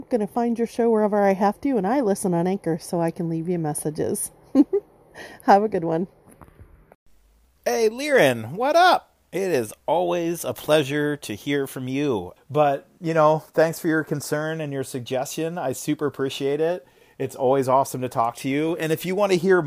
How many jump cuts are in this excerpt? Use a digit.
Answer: 1